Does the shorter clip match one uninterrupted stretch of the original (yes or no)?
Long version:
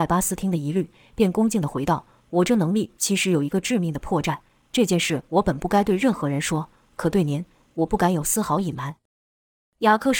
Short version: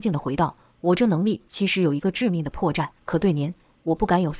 no